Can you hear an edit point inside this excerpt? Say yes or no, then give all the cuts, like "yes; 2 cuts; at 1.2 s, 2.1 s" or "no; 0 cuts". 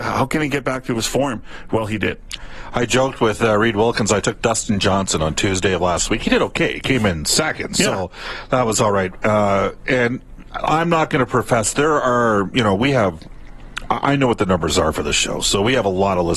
no; 0 cuts